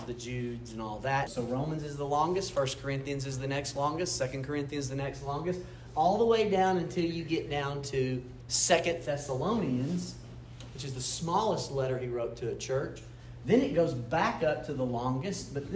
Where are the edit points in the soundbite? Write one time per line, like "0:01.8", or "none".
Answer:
0:01.3